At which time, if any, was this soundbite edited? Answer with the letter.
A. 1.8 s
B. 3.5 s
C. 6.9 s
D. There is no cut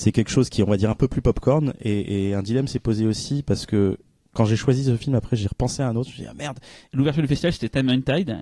C